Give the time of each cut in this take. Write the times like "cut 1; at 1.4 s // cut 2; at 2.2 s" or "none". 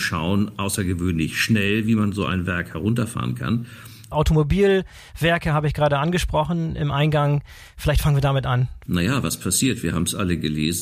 cut 1; at 4.1 s // cut 2; at 8.9 s